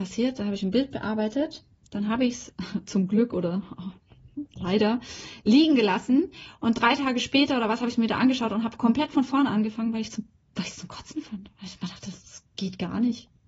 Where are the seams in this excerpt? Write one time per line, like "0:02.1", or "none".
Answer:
none